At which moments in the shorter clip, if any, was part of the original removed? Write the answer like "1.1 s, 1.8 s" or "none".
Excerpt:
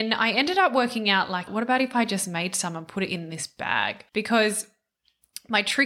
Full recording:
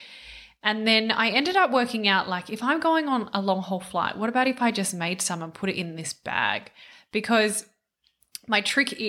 1.5 s, 4.1 s